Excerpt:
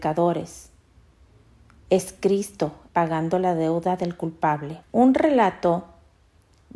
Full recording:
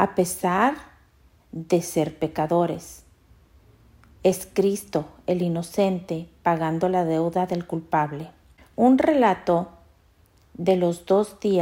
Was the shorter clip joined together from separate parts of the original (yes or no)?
yes